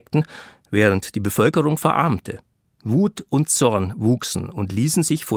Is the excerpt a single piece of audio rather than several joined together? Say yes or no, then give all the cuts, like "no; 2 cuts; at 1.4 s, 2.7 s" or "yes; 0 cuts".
yes; 0 cuts